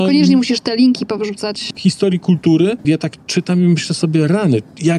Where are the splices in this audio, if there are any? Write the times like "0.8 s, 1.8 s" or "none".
1.7 s, 2.8 s